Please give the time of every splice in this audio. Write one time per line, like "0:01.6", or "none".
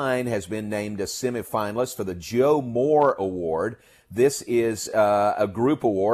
none